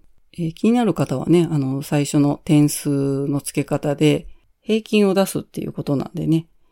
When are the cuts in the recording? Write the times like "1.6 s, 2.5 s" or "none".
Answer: none